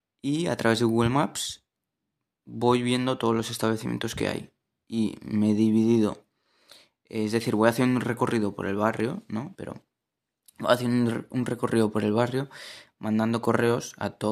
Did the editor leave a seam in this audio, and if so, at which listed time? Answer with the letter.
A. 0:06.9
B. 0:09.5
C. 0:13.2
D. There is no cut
B